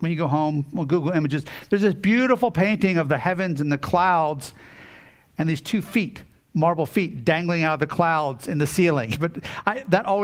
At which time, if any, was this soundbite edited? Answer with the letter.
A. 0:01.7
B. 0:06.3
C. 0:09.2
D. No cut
C